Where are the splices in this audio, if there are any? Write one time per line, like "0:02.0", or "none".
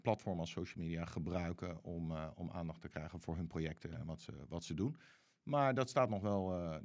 none